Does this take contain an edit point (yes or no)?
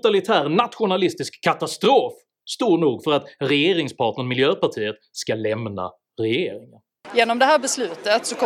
no